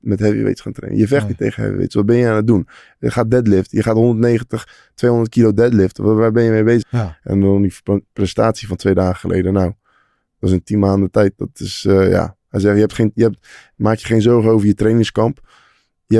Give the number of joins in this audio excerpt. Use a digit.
1